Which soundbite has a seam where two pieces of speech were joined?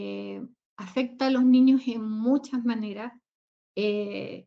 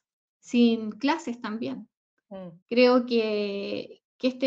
second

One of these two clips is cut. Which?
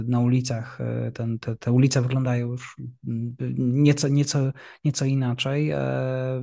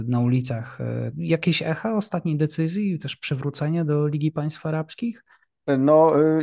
second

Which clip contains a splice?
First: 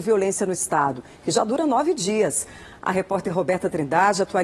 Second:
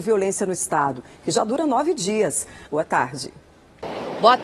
second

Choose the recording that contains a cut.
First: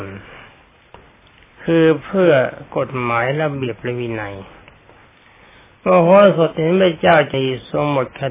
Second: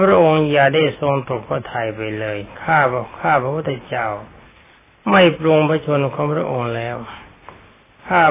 first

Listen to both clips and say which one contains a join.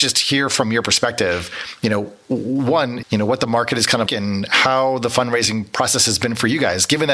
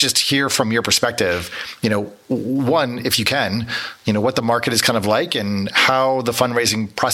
first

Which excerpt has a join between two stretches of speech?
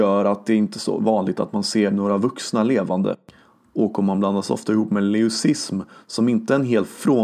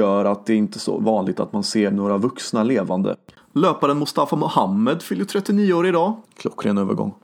second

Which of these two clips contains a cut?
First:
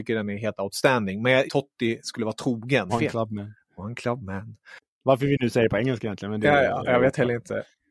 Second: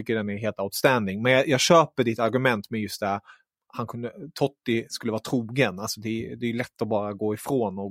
first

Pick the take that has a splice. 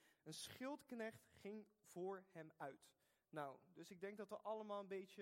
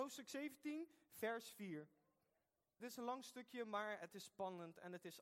second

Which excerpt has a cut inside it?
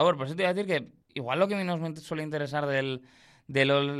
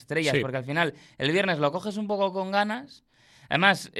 first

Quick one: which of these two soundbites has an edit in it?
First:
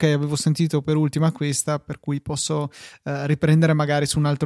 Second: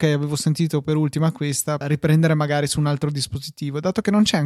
second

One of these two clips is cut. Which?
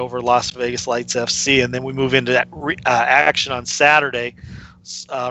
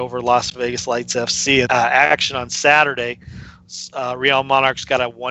second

